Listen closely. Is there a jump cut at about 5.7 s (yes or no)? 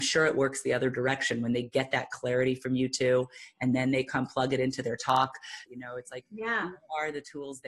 yes